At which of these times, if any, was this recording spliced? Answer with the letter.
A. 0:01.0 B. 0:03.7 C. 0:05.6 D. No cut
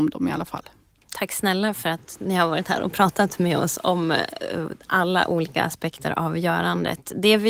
A